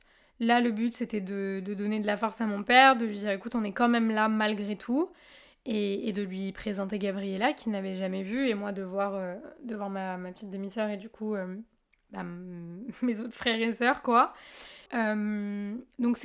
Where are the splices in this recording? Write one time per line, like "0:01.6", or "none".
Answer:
0:14.9